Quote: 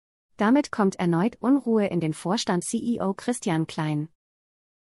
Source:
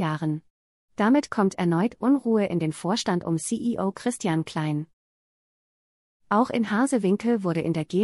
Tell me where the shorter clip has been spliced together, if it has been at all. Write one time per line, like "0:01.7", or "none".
0:02.6